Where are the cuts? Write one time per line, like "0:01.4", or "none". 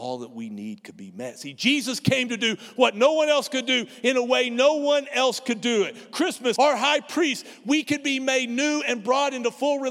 0:06.6